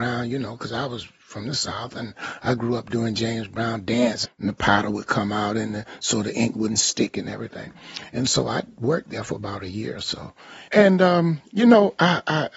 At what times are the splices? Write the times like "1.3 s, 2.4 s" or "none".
4.2 s, 10.7 s

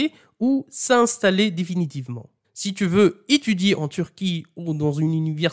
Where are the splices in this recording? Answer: 2.4 s

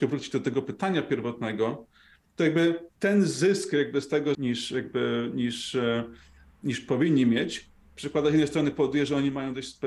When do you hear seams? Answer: 4.3 s

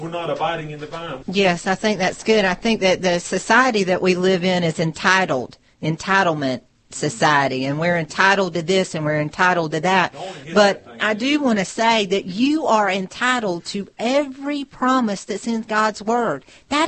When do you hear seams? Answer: 1.2 s

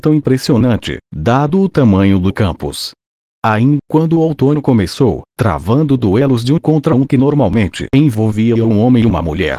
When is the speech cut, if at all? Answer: 3.8 s, 5.3 s

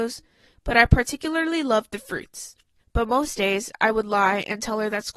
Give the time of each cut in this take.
2.8 s

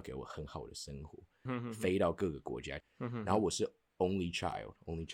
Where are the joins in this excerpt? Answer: 1.5 s, 2.8 s

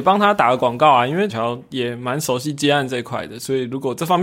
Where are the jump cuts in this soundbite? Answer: 1.3 s

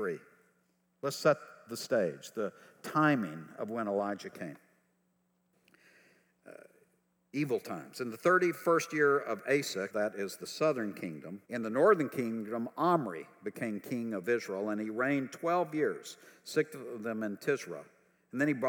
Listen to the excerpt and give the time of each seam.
9.9 s, 11.4 s

